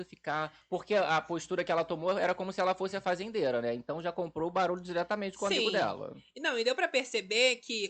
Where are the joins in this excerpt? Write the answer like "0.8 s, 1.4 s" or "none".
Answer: none

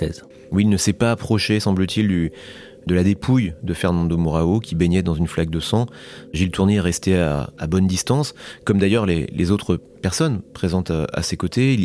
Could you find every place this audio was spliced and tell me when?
none

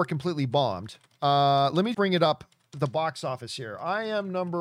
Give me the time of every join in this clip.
1.9 s

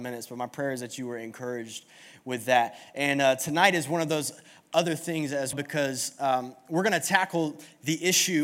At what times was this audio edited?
5.5 s

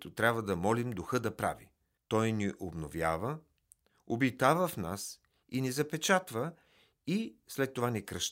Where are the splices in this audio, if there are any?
2.0 s

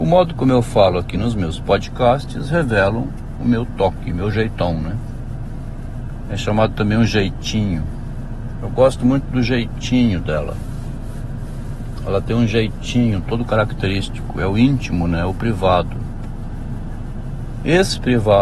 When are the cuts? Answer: none

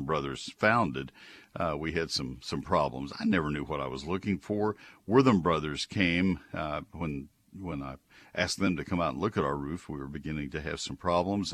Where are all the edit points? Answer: none

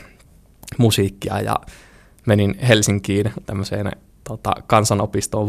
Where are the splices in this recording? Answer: 3.4 s

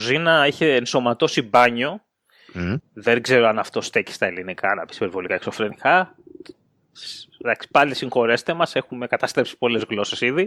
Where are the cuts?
2.8 s

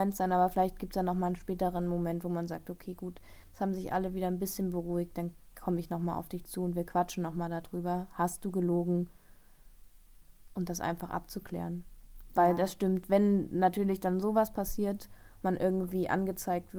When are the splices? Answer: none

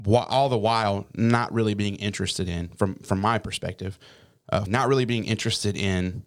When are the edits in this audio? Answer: 4.7 s

